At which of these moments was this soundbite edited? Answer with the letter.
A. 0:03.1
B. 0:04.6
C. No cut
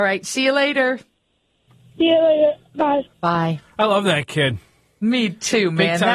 A